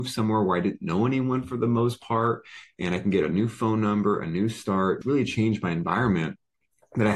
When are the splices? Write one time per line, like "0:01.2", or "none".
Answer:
0:05.0

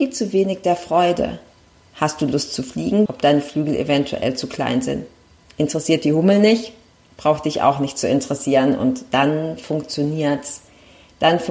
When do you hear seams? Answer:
0:03.1

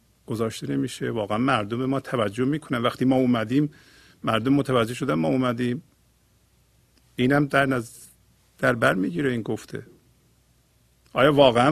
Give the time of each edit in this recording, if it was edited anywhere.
none

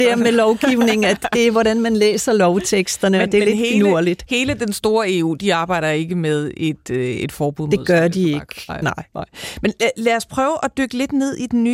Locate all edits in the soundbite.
none

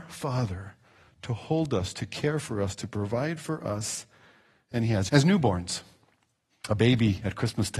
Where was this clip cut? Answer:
0:05.1

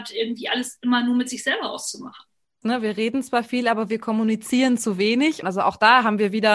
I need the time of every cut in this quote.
0:02.6
0:05.4

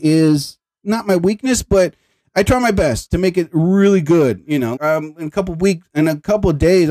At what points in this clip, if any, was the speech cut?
0:04.8

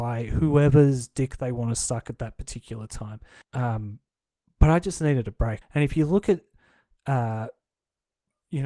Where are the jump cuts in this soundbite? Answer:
0:03.4
0:05.6

